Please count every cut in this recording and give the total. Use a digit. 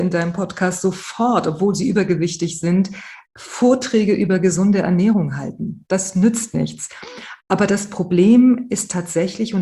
0